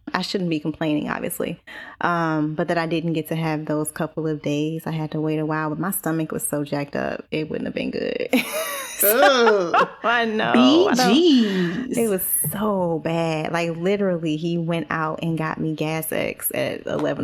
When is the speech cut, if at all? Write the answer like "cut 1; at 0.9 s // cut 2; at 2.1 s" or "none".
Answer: none